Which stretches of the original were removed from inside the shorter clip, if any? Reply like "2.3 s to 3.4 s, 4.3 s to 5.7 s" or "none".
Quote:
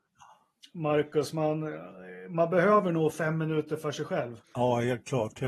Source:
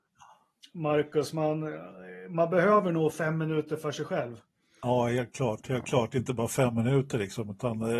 4.4 s to 4.7 s